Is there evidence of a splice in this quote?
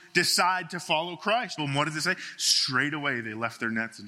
yes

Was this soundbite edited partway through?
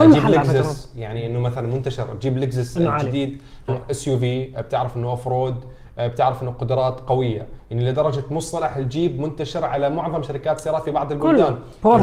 yes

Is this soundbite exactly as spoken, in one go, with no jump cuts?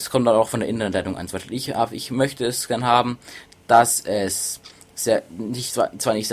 yes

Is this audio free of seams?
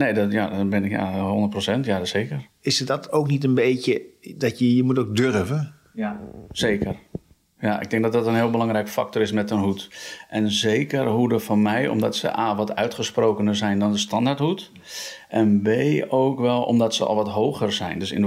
yes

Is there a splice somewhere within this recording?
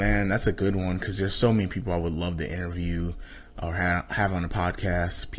no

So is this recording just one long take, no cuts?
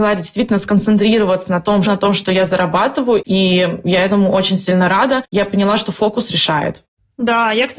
no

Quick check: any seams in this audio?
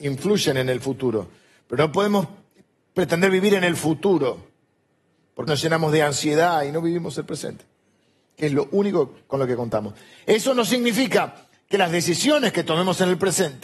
yes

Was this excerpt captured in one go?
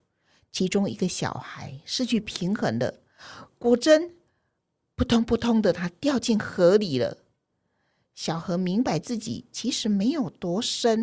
yes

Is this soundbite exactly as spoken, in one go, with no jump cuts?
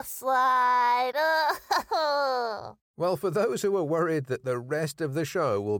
yes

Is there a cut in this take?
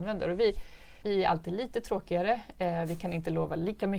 yes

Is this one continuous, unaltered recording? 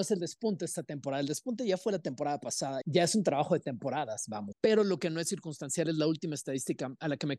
no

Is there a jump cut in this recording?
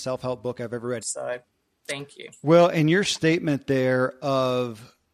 yes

